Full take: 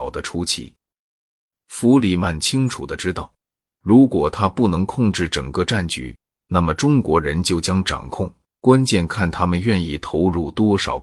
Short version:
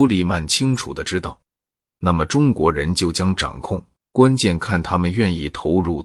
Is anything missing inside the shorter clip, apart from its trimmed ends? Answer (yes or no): yes